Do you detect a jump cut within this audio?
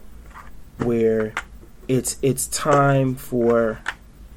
no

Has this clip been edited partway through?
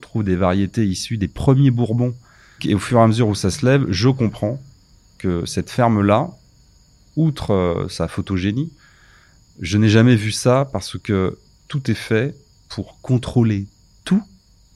yes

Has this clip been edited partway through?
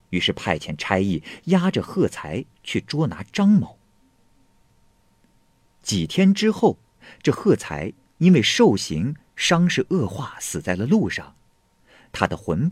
no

